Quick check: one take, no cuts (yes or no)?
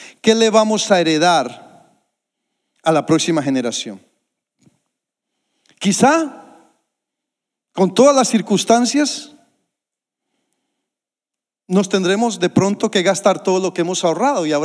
yes